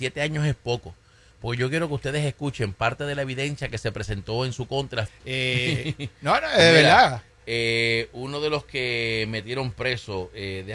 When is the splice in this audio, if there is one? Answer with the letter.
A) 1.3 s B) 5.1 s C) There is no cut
B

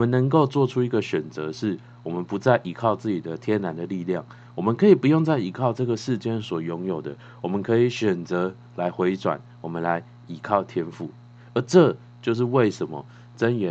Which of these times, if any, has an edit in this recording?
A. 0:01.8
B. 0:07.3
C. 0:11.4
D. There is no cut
D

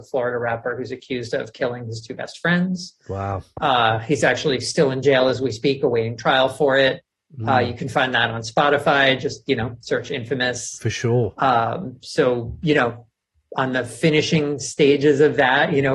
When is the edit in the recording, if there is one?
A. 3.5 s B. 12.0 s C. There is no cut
C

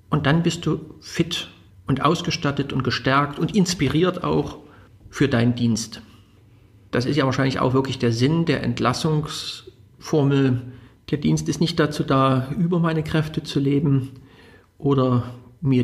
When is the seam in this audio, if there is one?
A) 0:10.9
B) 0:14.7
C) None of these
A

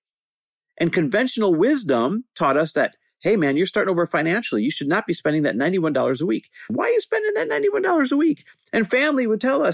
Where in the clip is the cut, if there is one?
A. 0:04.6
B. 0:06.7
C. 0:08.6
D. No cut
B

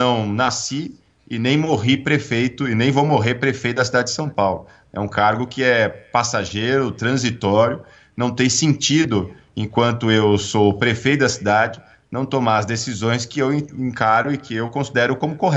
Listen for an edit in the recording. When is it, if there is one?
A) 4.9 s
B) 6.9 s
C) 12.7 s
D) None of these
D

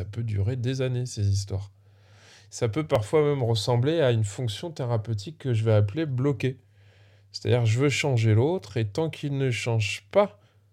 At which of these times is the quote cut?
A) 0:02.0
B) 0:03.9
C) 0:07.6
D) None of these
D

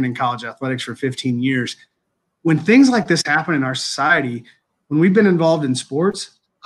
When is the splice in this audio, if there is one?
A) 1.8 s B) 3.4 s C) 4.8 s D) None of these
D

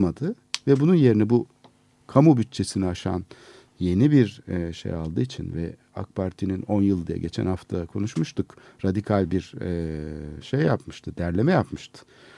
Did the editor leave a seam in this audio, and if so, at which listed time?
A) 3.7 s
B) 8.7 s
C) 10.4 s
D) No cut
D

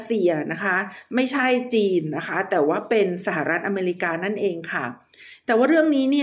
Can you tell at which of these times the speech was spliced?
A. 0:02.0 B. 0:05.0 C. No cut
C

